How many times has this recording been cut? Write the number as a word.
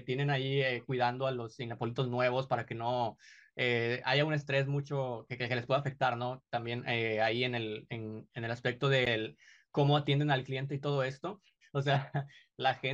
one